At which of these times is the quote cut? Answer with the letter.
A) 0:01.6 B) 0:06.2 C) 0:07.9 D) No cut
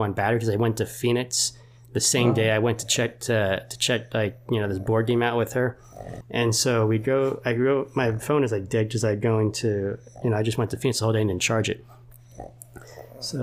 B